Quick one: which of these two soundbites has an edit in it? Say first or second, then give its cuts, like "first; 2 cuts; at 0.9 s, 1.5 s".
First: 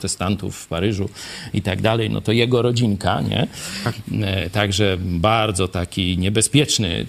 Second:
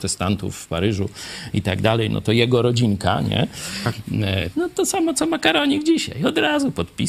second; 1 cut; at 4.5 s